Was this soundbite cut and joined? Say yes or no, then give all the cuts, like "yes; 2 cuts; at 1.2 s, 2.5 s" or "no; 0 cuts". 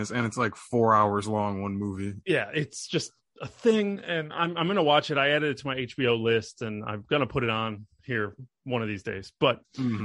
no; 0 cuts